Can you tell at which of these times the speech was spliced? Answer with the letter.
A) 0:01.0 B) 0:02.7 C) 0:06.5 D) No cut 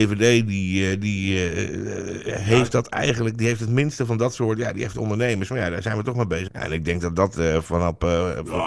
C